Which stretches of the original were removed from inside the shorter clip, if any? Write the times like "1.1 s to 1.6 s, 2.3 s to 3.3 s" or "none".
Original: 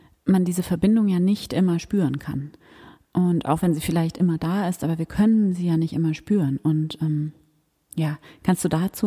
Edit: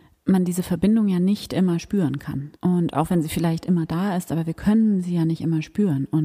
2.6 s to 3.1 s